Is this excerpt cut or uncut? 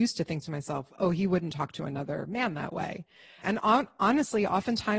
cut